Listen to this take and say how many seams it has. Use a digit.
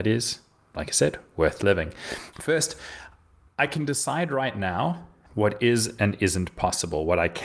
2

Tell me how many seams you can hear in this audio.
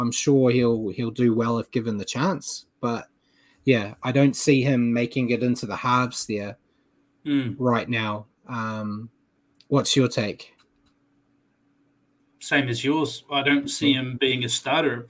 0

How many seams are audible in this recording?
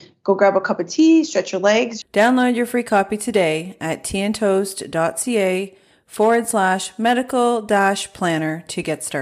1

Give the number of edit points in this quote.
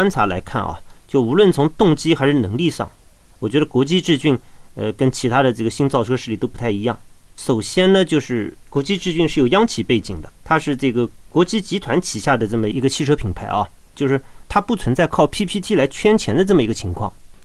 1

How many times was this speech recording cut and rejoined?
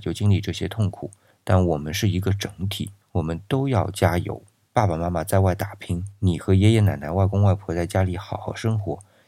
0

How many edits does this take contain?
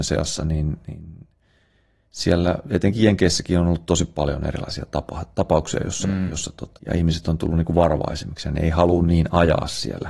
1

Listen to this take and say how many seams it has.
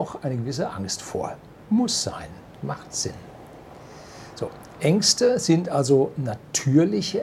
0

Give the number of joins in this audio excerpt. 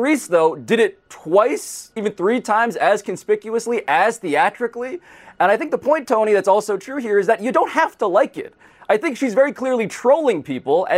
1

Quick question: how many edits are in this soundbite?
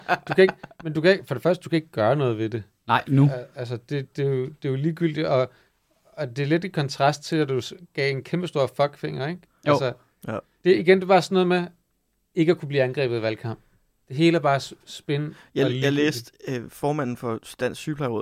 0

